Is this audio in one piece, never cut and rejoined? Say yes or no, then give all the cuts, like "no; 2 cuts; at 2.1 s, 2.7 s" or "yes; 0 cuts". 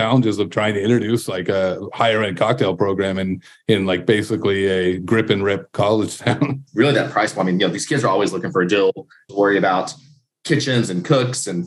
no; 1 cut; at 9.3 s